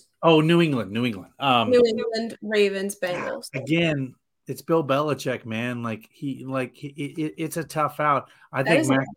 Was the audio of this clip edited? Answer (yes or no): no